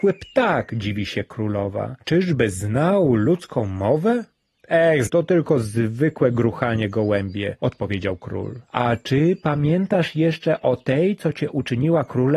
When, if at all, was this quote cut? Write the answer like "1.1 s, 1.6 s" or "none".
5.1 s